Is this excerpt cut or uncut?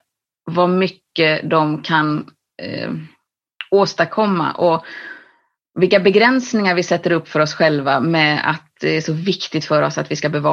uncut